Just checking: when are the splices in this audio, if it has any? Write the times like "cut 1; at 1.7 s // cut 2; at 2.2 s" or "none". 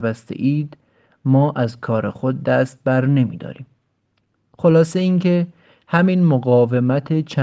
none